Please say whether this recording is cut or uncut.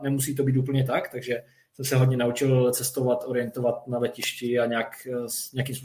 uncut